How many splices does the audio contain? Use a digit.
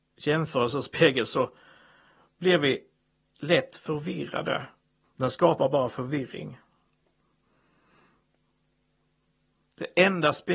1